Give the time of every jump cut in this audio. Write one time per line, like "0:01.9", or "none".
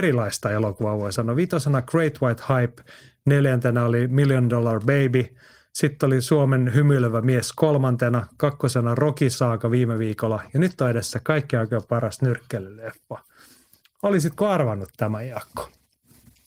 none

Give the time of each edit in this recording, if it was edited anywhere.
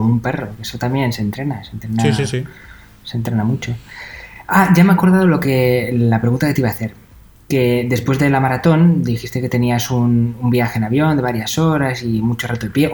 none

